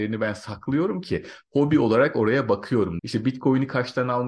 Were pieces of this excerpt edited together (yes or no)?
yes